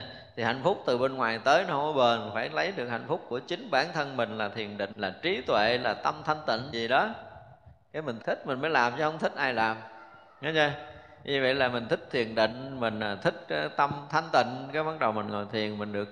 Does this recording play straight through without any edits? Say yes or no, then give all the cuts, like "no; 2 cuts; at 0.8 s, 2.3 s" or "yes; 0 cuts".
no; 3 cuts; at 4.9 s, 6.7 s, 8.2 s